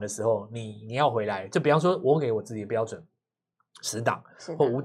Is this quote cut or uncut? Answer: uncut